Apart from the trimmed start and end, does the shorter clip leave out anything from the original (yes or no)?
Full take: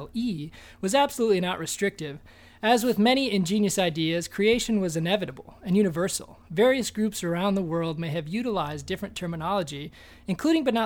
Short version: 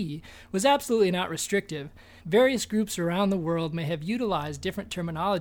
yes